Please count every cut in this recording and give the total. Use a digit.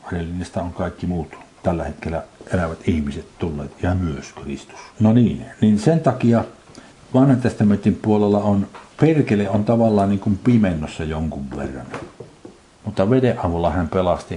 3